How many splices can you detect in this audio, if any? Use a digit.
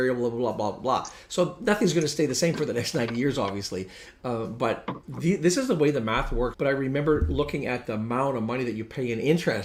1